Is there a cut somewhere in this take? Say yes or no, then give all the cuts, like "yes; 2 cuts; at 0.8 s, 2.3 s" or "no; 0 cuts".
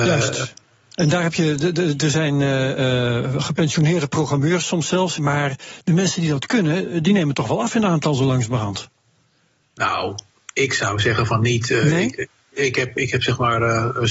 yes; 1 cut; at 5.2 s